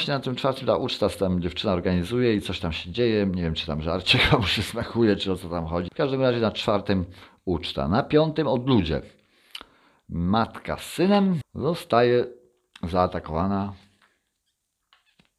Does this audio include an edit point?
yes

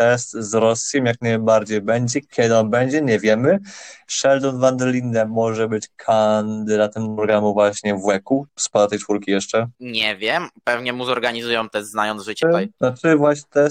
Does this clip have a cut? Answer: yes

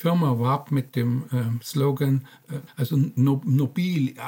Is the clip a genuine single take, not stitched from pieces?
no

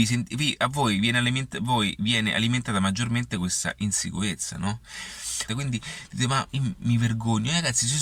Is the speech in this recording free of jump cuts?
no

